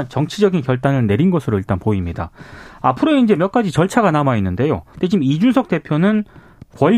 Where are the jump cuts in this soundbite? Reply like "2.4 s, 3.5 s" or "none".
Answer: 4.9 s